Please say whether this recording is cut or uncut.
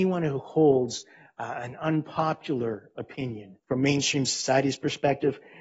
cut